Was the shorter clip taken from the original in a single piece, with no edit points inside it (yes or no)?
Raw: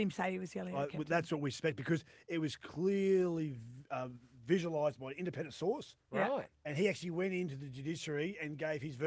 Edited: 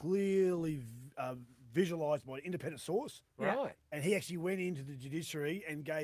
yes